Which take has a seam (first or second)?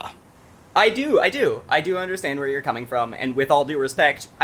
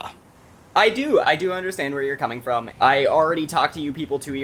second